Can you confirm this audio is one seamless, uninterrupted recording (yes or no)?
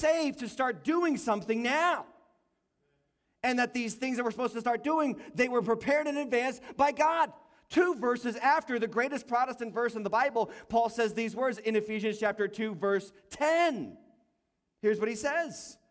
yes